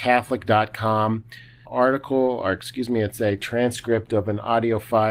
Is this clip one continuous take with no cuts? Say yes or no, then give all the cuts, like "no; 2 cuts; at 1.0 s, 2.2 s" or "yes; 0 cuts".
no; 1 cut; at 1.7 s